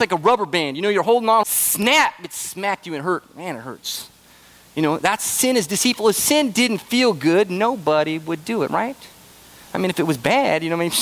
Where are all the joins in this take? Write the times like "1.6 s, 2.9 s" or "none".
1.4 s